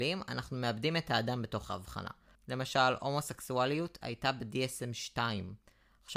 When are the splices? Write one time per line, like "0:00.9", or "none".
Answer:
0:02.4